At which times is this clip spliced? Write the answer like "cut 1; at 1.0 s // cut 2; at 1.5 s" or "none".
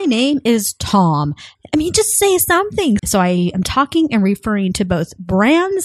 cut 1; at 1.5 s // cut 2; at 3.0 s